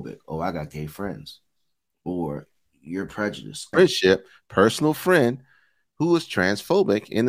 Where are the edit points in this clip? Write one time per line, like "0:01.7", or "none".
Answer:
0:03.7